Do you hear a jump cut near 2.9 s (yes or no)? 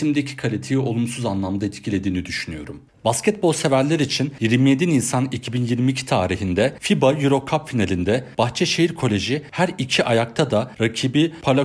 yes